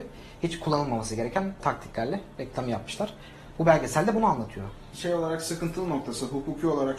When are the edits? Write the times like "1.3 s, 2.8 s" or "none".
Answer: 4.9 s